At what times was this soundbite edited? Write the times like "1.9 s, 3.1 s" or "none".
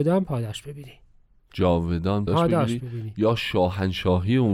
2.3 s